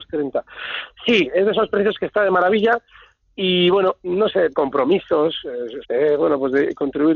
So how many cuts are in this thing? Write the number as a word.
two